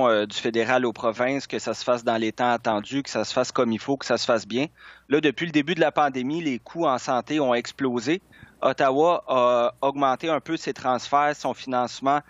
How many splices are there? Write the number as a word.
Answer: zero